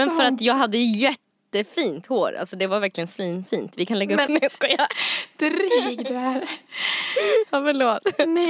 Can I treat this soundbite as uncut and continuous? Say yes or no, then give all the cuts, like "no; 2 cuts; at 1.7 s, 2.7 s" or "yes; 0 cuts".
no; 1 cut; at 4.3 s